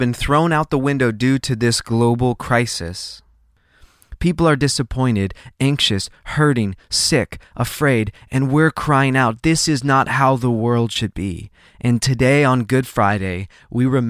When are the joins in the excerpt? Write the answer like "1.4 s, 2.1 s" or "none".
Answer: none